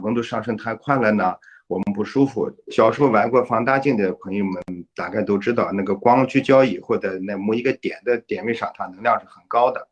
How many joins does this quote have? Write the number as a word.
one